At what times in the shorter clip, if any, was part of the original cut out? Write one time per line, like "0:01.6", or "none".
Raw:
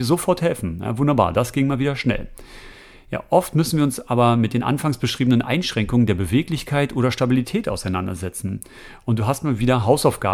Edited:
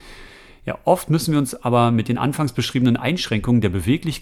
none

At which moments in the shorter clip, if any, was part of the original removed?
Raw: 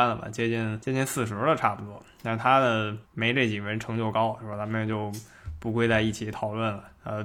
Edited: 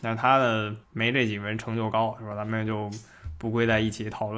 none

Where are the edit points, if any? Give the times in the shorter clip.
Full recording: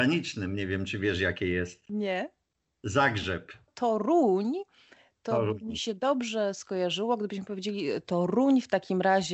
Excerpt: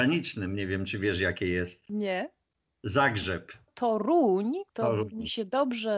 0:04.7

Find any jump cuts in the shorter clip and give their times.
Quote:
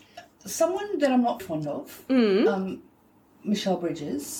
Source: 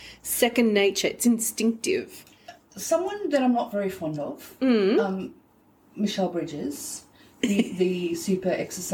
0:01.4

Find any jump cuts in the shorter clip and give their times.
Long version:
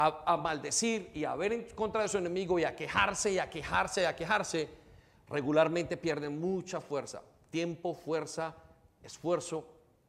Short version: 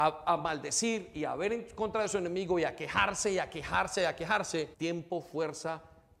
0:04.7

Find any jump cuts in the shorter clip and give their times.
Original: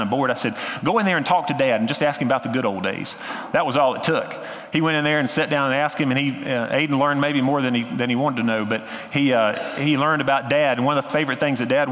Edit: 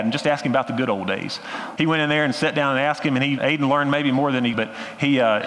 0:01.8
0:03.4
0:04.5

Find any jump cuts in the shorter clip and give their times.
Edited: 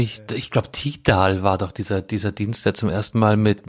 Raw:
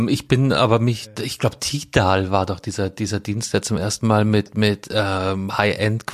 none

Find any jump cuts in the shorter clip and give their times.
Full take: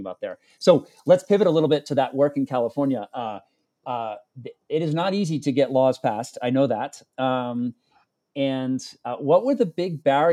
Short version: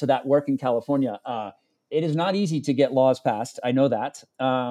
0:01.9

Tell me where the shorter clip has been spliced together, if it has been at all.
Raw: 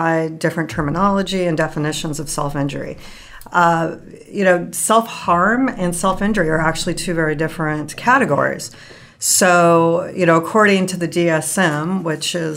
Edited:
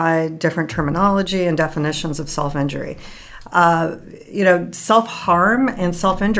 none

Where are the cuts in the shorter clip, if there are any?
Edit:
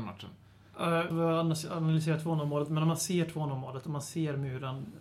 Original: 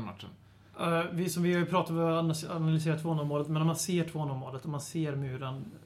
0:01.1

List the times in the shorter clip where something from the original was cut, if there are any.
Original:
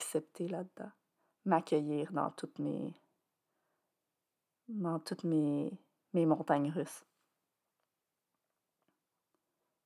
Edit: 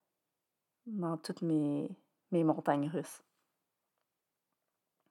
none

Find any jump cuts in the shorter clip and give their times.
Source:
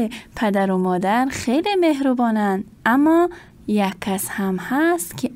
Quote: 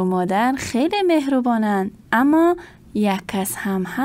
none

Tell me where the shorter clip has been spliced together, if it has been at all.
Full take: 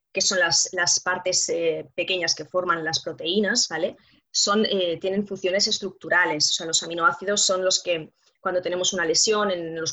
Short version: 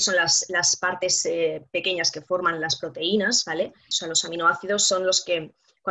0:03.9

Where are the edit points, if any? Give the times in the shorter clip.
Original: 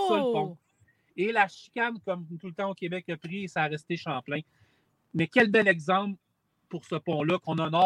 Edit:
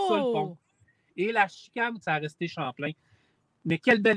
0:02.0

